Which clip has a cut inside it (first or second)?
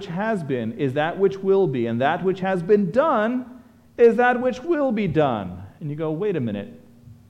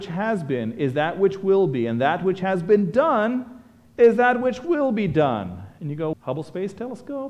second